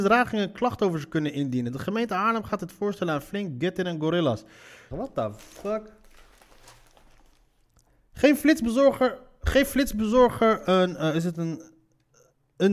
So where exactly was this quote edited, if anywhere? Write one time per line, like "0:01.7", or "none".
0:04.9